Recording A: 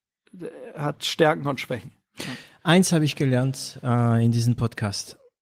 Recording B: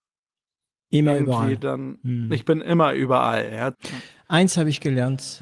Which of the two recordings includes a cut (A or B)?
B